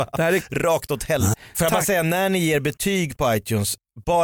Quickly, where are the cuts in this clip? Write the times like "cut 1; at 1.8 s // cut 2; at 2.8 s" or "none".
cut 1; at 1.3 s